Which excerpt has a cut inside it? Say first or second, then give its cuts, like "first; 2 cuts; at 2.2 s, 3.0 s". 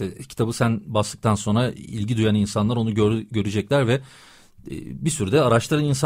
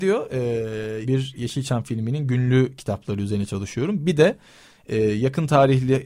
second; 1 cut; at 1.0 s